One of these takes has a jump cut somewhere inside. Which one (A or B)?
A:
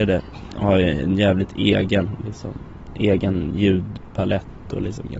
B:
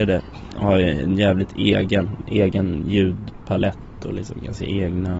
B